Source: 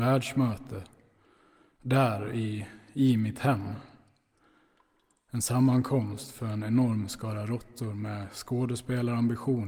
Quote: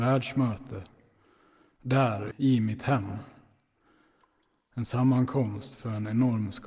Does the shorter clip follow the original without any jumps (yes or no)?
no